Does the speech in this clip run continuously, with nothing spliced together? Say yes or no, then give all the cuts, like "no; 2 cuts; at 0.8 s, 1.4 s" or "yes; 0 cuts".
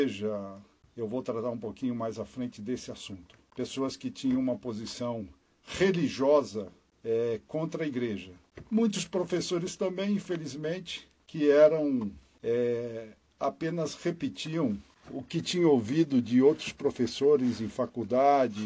yes; 0 cuts